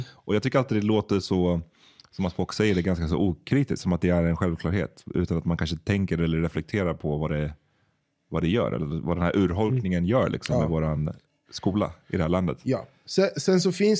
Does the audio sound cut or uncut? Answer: uncut